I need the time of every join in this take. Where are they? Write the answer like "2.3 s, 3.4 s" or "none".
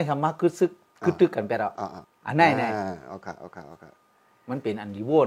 2.0 s